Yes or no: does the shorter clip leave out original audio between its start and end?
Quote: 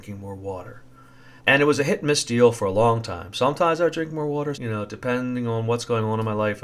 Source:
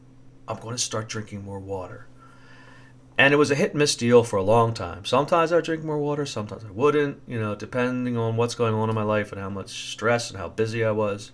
yes